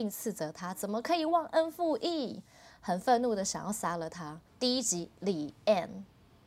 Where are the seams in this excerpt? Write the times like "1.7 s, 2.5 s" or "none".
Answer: 4.5 s